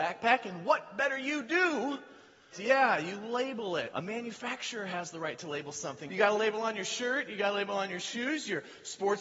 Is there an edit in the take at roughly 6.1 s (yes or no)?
yes